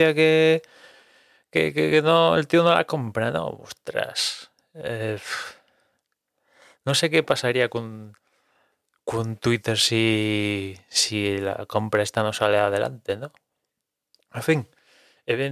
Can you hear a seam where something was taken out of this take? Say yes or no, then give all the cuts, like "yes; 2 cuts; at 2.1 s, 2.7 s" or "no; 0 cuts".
no; 0 cuts